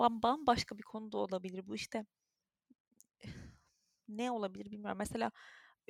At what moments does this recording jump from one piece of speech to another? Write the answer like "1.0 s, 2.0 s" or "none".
none